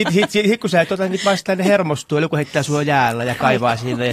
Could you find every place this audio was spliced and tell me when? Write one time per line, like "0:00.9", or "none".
none